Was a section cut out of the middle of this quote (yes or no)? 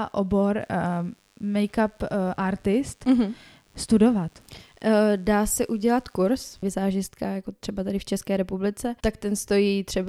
yes